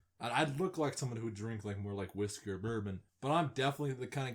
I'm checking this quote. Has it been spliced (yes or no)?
yes